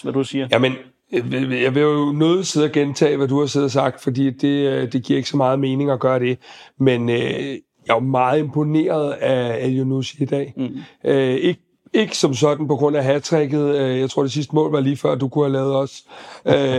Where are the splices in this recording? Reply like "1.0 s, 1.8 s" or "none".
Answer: none